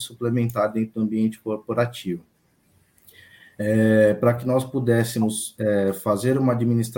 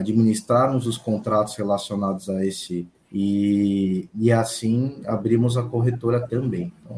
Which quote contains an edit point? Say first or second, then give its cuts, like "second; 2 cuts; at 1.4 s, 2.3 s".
second; 1 cut; at 2.9 s